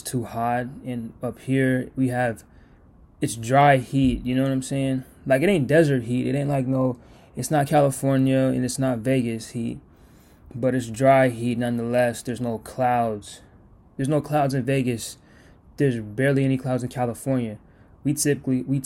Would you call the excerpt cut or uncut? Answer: uncut